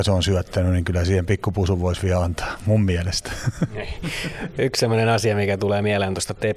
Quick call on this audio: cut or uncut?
uncut